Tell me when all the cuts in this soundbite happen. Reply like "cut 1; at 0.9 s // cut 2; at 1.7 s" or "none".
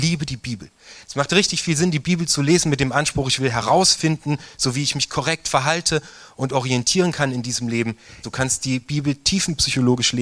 cut 1; at 1.0 s // cut 2; at 8.2 s